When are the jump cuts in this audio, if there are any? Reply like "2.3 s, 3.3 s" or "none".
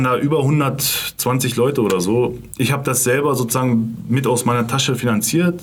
none